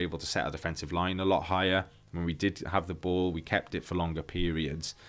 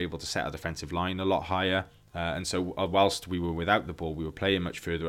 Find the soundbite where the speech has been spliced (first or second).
second